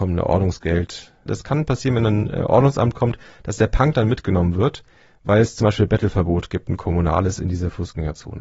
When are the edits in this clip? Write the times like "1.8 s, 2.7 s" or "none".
1.3 s